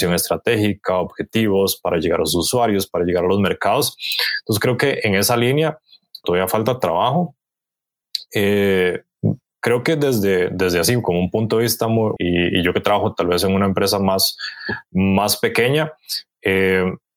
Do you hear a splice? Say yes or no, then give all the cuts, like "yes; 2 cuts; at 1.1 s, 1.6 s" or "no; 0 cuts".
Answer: yes; 2 cuts; at 6.2 s, 12.2 s